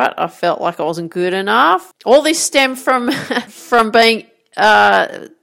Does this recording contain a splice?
yes; 2 cuts; at 1.9 s, 3.5 s

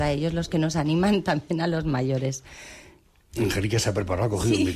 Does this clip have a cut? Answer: no; 0 cuts

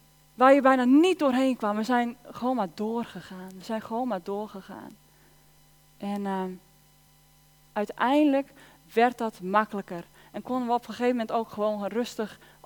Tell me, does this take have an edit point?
no; 0 cuts

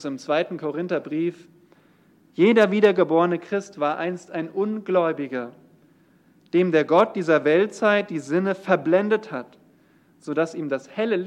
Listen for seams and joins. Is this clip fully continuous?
yes; 0 cuts

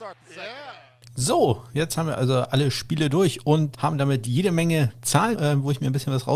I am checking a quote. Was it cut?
yes; 2 cuts; at 3.7 s, 5.3 s

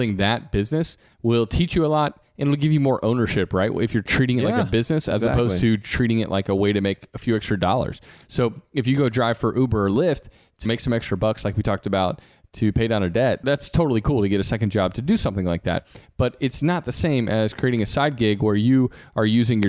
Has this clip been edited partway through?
yes; 1 cut; at 10.6 s

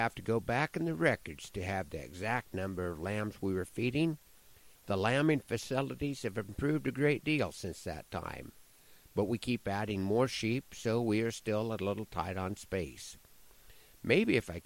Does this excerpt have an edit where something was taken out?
yes; 1 cut; at 4.7 s

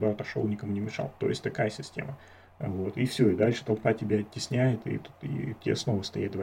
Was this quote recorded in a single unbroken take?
yes; 0 cuts

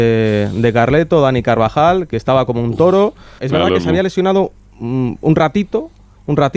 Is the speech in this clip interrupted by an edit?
yes; 1 cut; at 3.4 s

